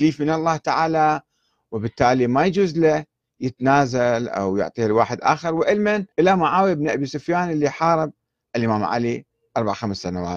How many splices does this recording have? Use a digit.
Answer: 1